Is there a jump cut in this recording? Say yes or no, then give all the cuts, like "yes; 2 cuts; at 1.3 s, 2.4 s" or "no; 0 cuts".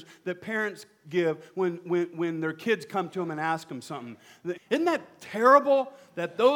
yes; 1 cut; at 4.5 s